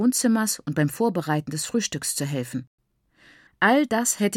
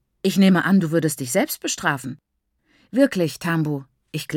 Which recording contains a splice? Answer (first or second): first